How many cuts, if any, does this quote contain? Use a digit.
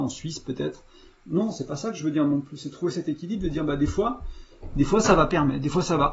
1